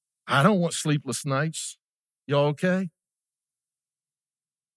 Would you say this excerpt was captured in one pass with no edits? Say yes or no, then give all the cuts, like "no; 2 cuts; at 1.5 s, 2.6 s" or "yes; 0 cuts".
yes; 0 cuts